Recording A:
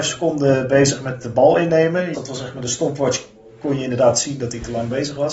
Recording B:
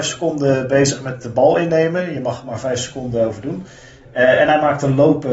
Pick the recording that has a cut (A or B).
A